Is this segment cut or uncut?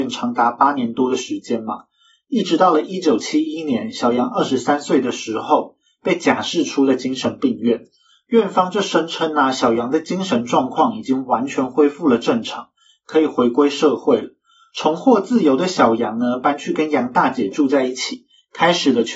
uncut